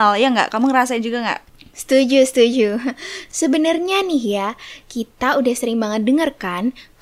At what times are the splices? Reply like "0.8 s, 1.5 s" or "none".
4.8 s